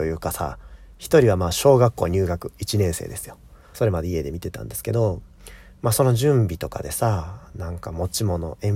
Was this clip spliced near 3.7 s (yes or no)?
yes